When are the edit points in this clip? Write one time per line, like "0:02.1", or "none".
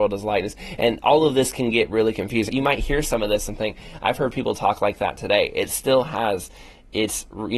0:02.5